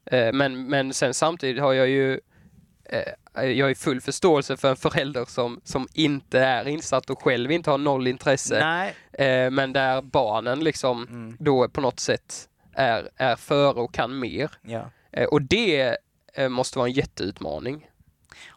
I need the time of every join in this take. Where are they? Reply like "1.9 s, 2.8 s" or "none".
none